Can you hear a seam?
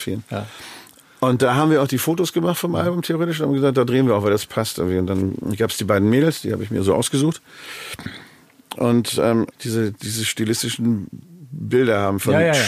yes; 1 cut; at 9.5 s

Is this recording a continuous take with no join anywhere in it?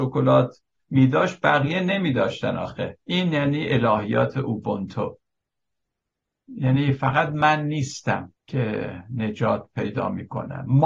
no; 2 cuts; at 3.0 s, 8.4 s

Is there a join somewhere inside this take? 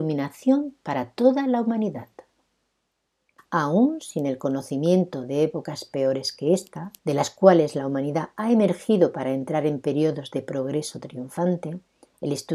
yes; 2 cuts; at 3.4 s, 7.0 s

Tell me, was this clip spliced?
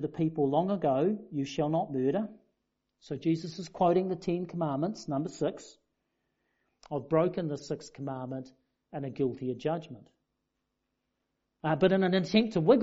yes; 1 cut; at 6.8 s

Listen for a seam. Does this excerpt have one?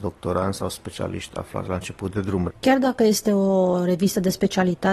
yes; 1 cut; at 2.5 s

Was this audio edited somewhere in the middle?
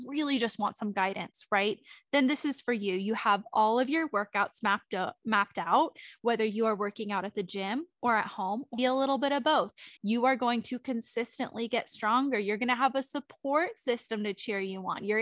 yes; 2 cuts; at 8.8 s, 10.0 s

